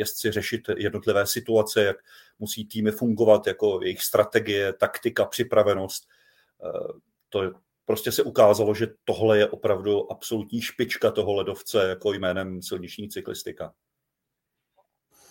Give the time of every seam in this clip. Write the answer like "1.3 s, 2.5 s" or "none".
none

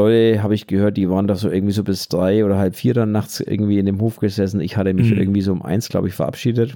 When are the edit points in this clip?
none

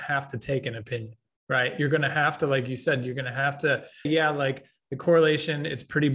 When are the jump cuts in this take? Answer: 4.0 s

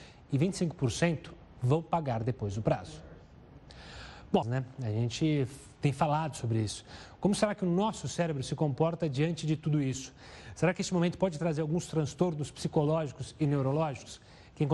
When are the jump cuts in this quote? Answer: 4.4 s

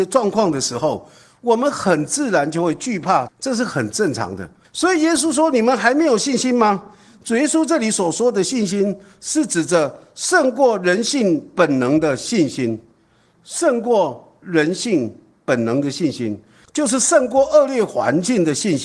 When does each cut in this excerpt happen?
3.3 s, 4.6 s, 16.6 s

